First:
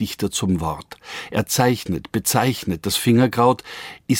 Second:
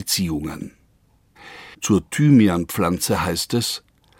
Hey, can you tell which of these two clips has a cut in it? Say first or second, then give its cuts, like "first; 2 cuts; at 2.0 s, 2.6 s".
second; 1 cut; at 1.7 s